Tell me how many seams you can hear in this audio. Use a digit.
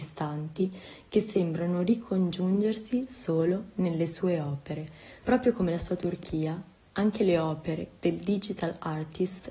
1